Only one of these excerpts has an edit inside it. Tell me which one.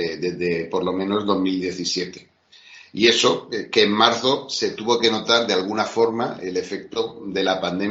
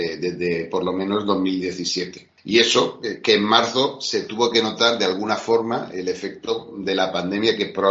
second; 1 cut; at 2.4 s

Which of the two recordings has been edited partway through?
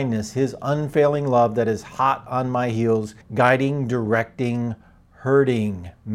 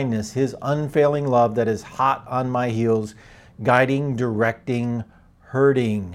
first; 1 cut; at 3.2 s

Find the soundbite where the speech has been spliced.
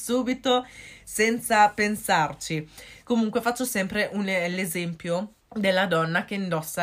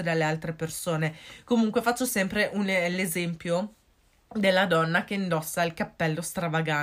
first; 2 cuts; at 3.0 s, 5.4 s

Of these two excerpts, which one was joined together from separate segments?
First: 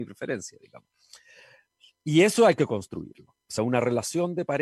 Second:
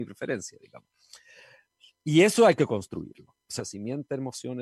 second; 1 cut; at 3.6 s

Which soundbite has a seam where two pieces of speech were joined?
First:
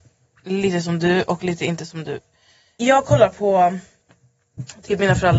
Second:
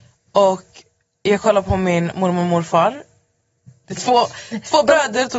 second; 1 cut; at 3.8 s

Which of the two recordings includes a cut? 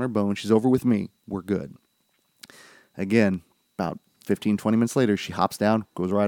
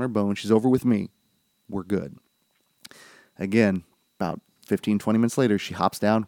first; 1 cut; at 1.2 s

